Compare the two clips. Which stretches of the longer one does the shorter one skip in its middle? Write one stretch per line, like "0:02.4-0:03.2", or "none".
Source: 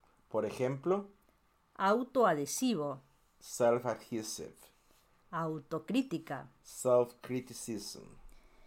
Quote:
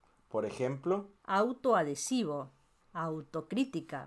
0:01.2-0:01.7
0:03.3-0:05.2